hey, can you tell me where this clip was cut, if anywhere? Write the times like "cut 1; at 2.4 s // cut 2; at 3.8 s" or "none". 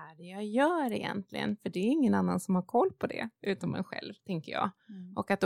none